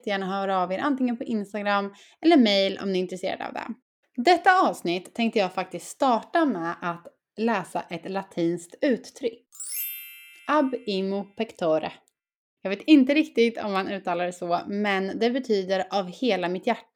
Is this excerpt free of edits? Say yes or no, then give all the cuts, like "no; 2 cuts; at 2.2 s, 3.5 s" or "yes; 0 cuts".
yes; 0 cuts